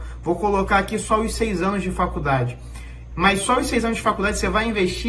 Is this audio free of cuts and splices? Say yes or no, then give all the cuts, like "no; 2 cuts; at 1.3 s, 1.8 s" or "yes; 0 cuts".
no; 1 cut; at 3.1 s